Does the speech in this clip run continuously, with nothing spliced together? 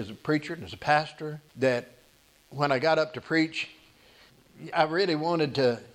no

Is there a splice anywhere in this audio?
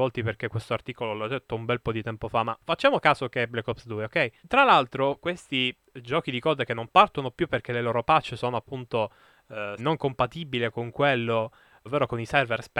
yes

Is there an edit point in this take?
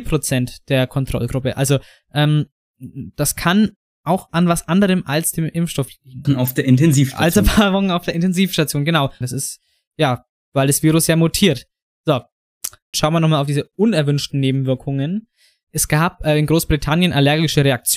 yes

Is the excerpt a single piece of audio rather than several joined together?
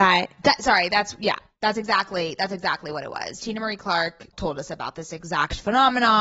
yes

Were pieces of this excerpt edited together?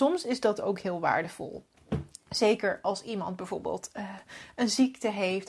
no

